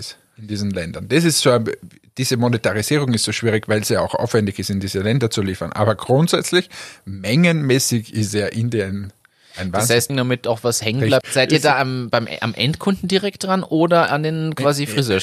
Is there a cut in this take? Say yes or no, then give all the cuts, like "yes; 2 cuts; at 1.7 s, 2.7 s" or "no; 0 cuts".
yes; 2 cuts; at 10.1 s, 11.2 s